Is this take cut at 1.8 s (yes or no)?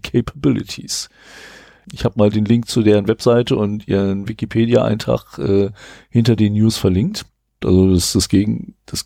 yes